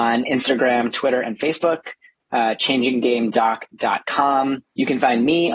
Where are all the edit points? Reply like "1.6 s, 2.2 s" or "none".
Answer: none